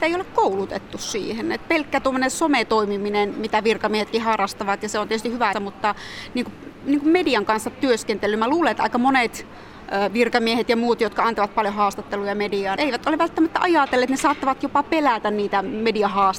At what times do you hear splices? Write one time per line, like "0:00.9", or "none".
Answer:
0:05.5
0:12.8